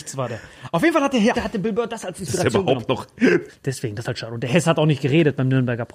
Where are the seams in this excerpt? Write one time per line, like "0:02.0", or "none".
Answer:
0:01.3
0:03.5